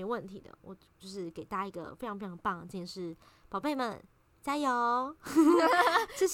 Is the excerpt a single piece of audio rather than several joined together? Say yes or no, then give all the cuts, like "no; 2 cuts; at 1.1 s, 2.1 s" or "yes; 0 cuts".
yes; 0 cuts